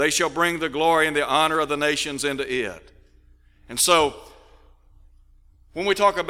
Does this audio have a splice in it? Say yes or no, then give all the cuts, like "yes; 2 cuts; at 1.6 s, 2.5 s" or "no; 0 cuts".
no; 0 cuts